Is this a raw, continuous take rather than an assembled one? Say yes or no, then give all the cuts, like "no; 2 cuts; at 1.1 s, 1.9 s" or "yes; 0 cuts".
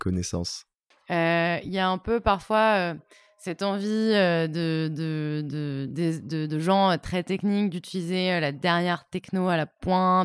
no; 1 cut; at 0.9 s